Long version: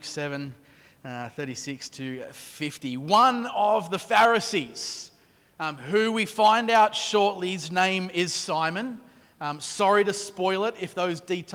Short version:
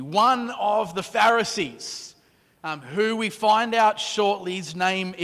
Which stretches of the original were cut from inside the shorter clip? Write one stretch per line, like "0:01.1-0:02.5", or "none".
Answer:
none